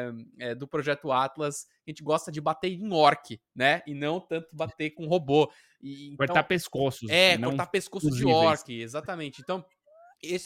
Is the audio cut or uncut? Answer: uncut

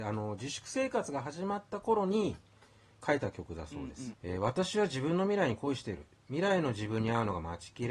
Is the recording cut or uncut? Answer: cut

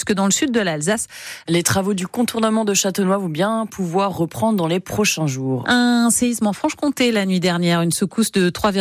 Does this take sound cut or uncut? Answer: cut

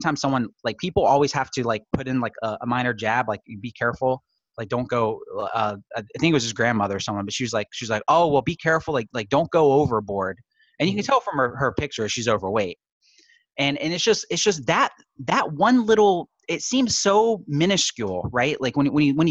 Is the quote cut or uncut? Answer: uncut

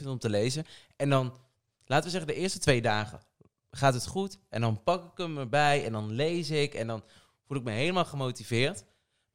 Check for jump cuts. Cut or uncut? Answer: uncut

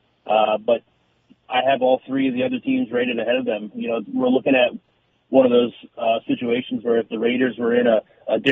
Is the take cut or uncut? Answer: uncut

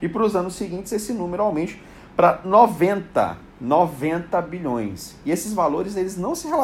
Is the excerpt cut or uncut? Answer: uncut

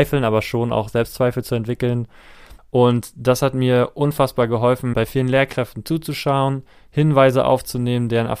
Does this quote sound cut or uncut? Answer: cut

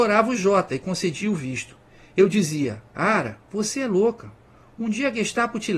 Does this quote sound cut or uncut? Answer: uncut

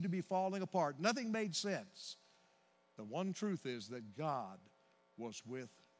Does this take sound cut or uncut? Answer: uncut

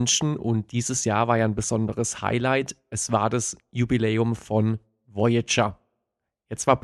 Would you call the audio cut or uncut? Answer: uncut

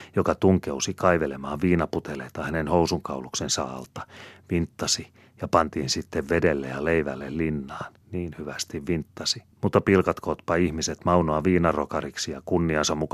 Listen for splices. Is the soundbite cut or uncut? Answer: cut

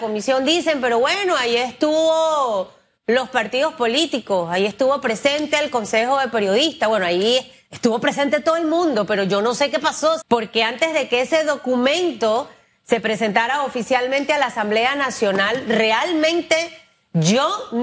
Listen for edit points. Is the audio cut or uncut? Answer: cut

